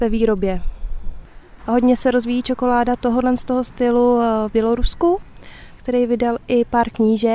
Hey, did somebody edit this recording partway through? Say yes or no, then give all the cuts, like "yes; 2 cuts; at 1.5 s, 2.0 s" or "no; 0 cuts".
yes; 2 cuts; at 1.6 s, 5.8 s